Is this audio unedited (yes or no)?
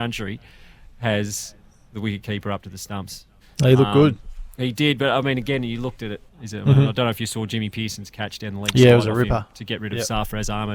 no